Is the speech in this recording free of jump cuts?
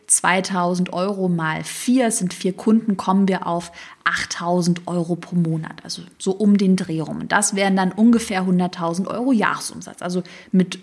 yes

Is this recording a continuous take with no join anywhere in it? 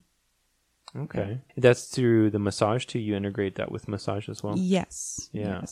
no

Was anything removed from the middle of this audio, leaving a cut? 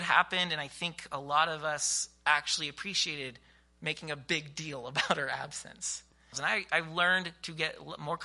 yes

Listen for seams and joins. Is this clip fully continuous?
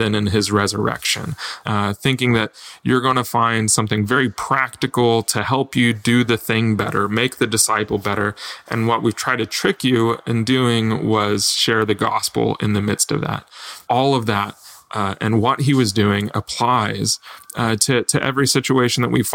no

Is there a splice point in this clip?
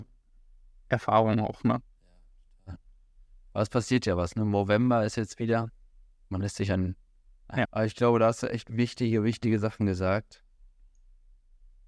yes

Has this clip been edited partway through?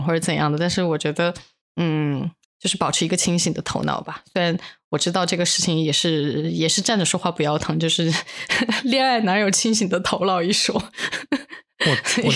no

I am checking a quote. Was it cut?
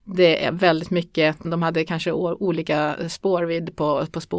yes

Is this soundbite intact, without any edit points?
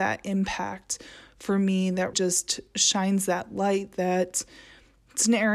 no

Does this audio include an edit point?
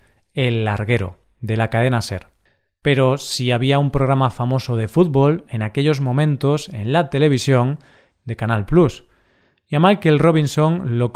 yes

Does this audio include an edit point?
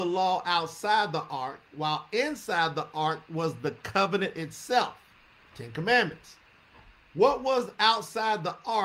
no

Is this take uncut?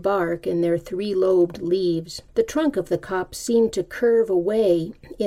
no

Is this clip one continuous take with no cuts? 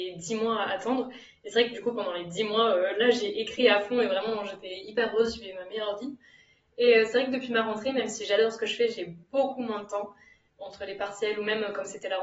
yes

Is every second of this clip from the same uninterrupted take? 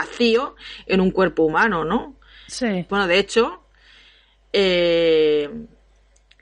no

